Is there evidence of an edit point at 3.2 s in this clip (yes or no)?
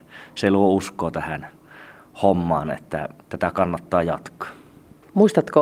yes